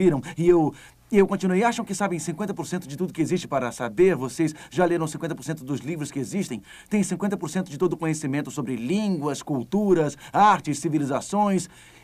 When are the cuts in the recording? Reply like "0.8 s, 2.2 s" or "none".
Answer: none